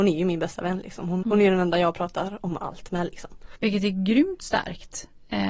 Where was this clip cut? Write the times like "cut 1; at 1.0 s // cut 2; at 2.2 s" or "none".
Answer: cut 1; at 1.2 s // cut 2; at 3.6 s